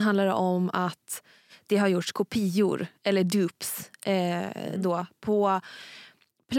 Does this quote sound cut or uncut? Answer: uncut